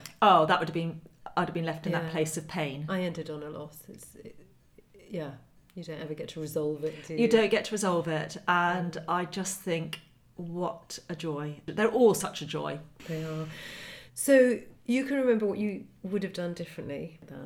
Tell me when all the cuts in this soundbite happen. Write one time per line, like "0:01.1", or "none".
none